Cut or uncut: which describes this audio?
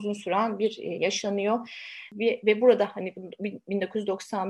cut